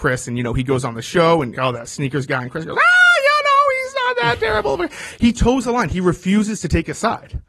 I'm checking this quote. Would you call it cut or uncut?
cut